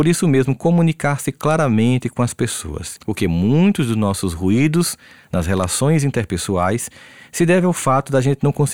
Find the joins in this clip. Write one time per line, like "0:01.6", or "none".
0:03.0